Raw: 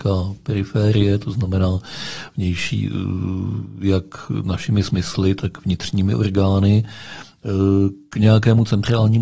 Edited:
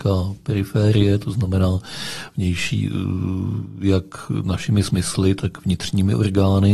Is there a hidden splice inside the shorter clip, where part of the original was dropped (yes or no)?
no